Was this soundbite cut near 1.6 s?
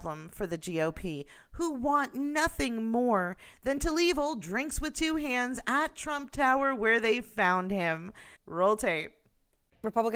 no; 1 cut; at 8.4 s

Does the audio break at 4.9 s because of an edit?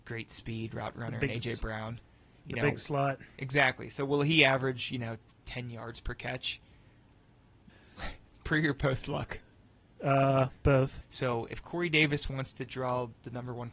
no; 2 cuts; at 7.7 s, 11.0 s

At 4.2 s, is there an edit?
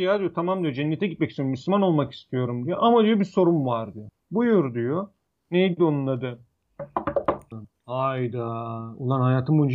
no; 1 cut; at 7.5 s

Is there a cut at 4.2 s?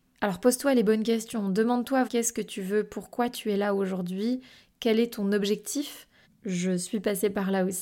no; 2 cuts; at 2.0 s, 6.2 s

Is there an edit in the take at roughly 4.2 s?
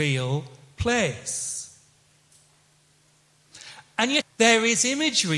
yes; 1 cut; at 4.2 s

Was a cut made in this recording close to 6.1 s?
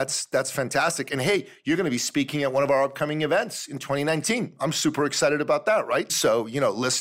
yes; 1 cut; at 6.1 s

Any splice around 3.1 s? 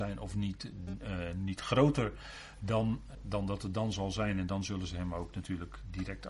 yes; 1 cut; at 3.1 s

